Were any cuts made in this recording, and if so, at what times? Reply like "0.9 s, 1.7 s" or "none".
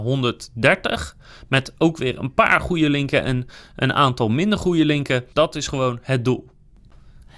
5.3 s